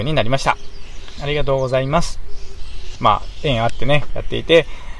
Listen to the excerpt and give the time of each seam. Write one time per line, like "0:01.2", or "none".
0:01.2
0:03.0
0:04.1